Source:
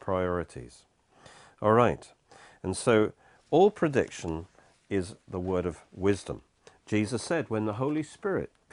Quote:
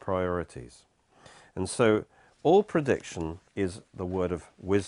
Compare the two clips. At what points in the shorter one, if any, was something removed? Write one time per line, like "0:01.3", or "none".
0:01.4
0:03.5